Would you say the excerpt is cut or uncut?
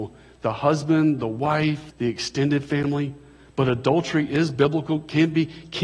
cut